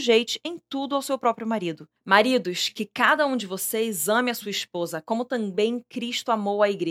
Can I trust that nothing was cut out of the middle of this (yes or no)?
yes